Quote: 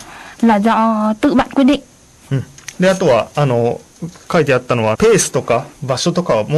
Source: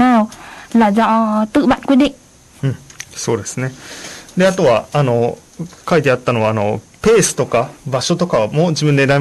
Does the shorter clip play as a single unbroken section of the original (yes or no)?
no